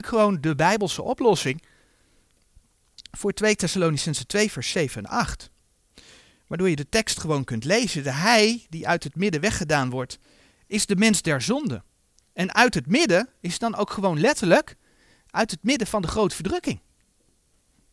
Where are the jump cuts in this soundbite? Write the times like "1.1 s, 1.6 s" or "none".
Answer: none